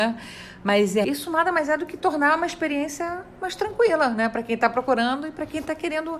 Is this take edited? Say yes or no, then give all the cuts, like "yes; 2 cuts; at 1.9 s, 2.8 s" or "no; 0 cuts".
yes; 1 cut; at 1.0 s